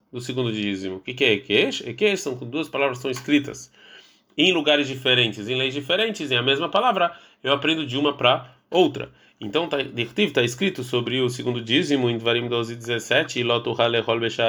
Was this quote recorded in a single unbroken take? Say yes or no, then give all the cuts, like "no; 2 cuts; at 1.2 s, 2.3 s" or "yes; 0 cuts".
yes; 0 cuts